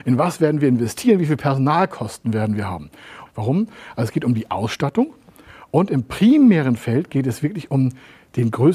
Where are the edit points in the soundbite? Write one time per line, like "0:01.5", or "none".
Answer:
0:03.3